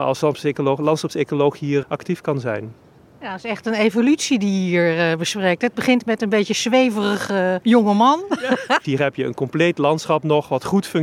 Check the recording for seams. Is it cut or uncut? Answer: cut